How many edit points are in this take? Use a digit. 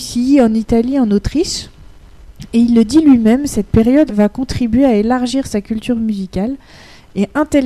1